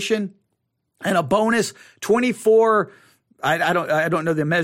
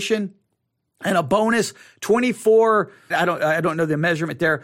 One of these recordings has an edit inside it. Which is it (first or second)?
second